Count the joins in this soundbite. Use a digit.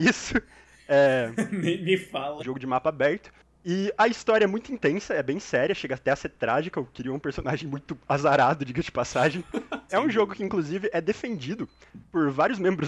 2